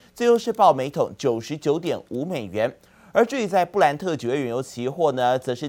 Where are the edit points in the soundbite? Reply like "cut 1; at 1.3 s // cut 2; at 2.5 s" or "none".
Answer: none